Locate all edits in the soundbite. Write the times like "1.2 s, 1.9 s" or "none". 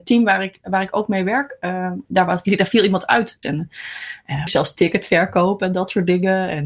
3.4 s, 4.5 s